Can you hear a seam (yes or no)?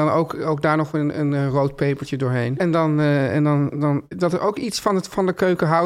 yes